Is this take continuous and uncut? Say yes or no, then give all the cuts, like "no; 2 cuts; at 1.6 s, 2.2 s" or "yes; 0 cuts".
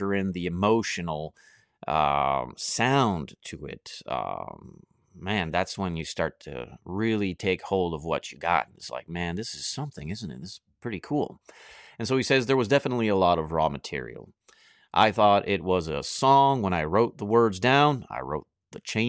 yes; 0 cuts